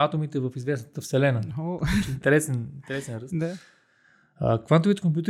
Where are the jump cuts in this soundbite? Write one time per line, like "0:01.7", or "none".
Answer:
none

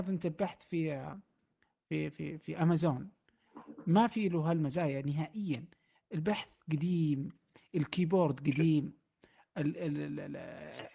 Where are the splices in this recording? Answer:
none

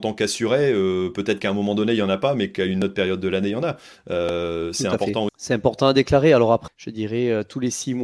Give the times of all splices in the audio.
0:05.3
0:06.7

